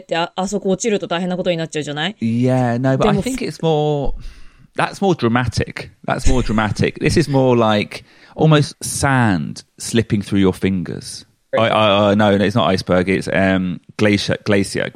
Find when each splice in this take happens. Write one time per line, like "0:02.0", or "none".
0:08.7
0:11.5